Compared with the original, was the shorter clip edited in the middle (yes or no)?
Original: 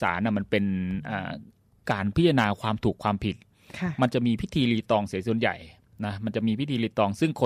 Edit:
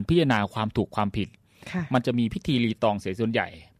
no